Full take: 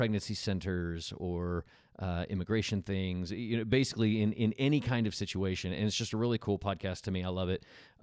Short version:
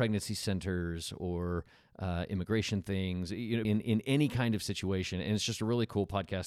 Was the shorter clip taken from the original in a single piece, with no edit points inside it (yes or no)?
no